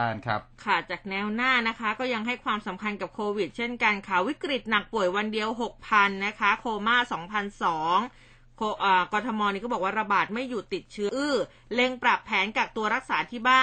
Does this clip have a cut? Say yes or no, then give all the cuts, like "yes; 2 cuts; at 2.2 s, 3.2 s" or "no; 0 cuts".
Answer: yes; 1 cut; at 11.1 s